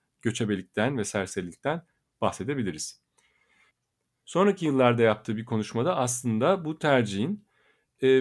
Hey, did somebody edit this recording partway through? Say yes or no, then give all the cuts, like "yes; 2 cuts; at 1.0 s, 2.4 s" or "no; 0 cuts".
no; 0 cuts